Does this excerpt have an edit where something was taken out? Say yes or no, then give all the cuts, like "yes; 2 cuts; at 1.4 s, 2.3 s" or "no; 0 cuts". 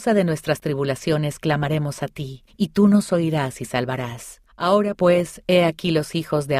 no; 0 cuts